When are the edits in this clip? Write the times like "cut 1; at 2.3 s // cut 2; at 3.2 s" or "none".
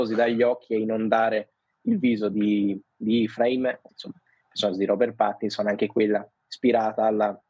cut 1; at 3.9 s